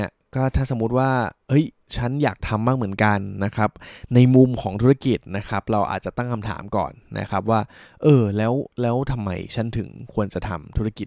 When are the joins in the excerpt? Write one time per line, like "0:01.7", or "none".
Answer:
none